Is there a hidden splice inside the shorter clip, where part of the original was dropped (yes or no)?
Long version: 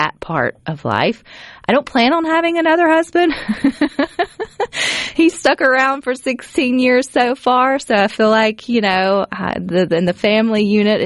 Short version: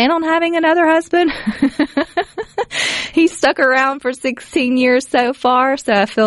no